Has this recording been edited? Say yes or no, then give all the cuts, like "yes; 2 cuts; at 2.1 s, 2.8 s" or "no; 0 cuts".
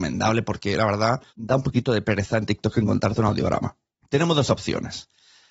yes; 2 cuts; at 1.3 s, 3.9 s